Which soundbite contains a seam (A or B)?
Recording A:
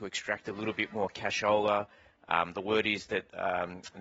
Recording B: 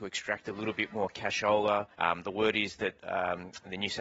B